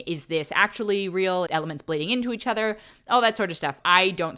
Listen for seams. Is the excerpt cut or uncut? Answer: cut